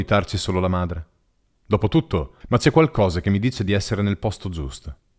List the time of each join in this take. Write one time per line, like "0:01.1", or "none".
0:02.4

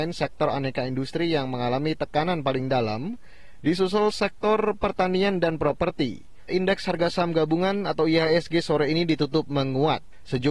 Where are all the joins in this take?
0:06.5

